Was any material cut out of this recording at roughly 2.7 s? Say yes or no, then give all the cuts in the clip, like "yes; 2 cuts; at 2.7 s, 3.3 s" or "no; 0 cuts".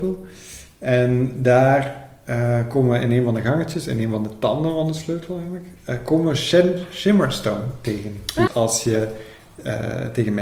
no; 1 cut; at 8.5 s